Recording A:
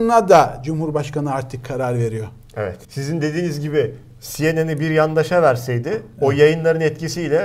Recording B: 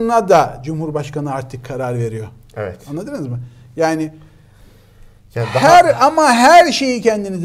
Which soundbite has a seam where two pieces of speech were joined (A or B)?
A